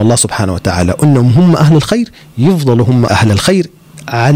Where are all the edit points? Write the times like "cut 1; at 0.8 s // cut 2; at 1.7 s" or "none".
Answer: cut 1; at 3.1 s